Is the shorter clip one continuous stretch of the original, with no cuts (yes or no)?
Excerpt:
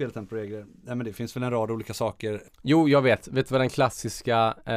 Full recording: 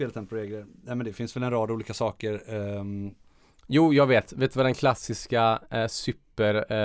no